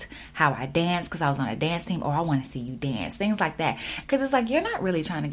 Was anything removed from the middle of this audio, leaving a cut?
yes; 1 cut; at 4.0 s

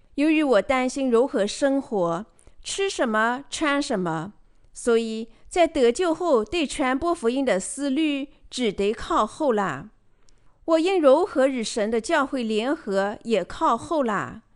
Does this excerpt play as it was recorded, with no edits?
yes; 0 cuts

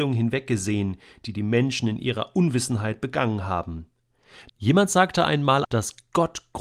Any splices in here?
yes; 2 cuts; at 4.5 s, 5.6 s

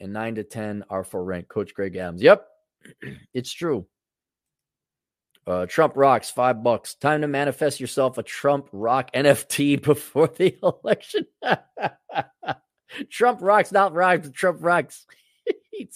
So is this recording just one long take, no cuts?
yes; 0 cuts

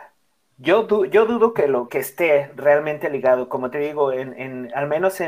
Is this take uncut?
no; 1 cut; at 1.9 s

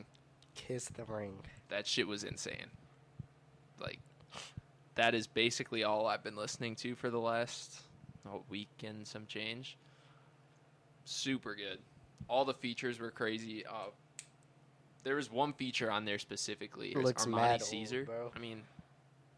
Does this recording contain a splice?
yes; 3 cuts; at 11.0 s, 16.9 s, 18.3 s

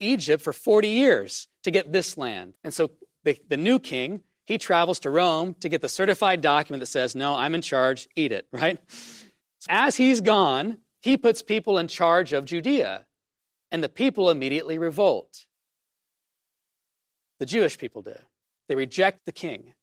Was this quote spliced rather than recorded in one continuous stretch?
yes; 2 cuts; at 2.6 s, 9.7 s

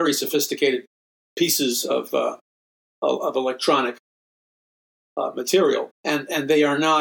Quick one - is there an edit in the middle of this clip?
yes; 1 cut; at 5.9 s

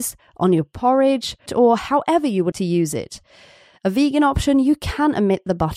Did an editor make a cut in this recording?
yes; 2 cuts; at 1.5 s, 2.5 s

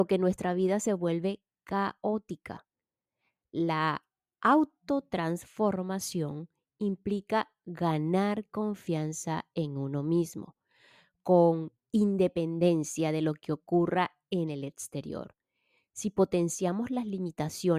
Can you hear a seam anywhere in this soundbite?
no; 0 cuts

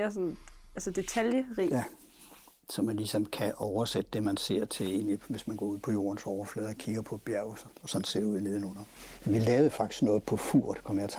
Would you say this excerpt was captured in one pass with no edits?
no; 2 cuts; at 5.8 s, 7.7 s

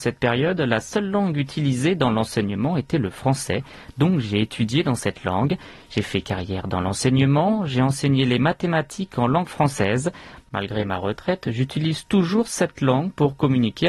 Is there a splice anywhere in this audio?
no; 0 cuts

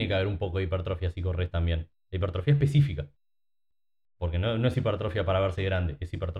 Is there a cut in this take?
no; 0 cuts

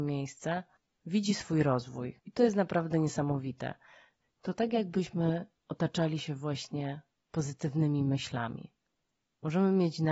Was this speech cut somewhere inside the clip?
no; 0 cuts

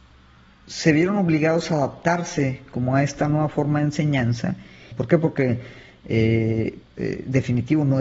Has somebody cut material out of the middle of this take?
yes; 2 cuts; at 4.9 s, 6.8 s

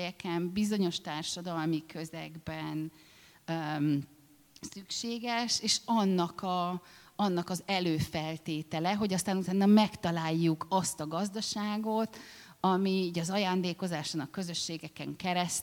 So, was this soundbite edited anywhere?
no; 0 cuts

